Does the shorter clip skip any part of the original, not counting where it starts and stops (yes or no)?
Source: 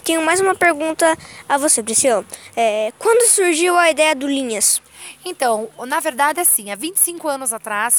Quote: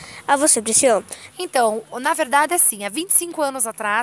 yes